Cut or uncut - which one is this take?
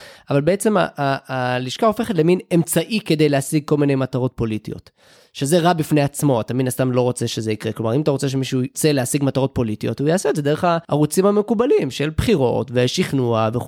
uncut